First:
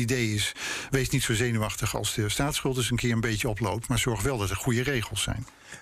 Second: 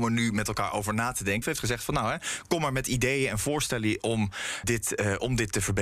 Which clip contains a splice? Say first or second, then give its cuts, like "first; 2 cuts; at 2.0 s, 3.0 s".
second; 2 cuts; at 1.4 s, 4.6 s